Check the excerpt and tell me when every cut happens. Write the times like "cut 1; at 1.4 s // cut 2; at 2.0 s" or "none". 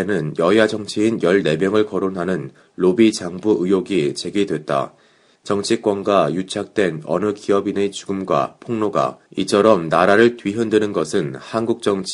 cut 1; at 5.3 s // cut 2; at 9.3 s